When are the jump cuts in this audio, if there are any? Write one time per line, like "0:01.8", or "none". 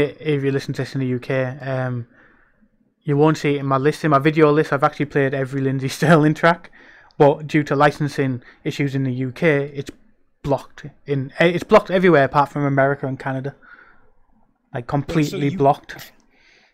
none